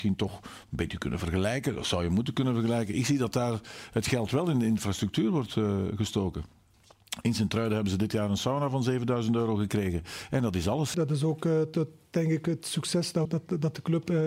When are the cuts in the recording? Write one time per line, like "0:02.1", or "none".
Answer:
0:10.9
0:13.2